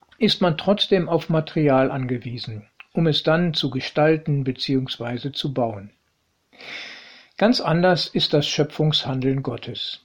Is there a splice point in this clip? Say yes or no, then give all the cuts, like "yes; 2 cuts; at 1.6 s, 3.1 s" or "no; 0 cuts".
no; 0 cuts